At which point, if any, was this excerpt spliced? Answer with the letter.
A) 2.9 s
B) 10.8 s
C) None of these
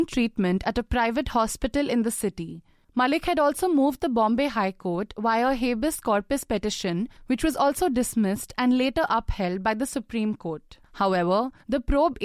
B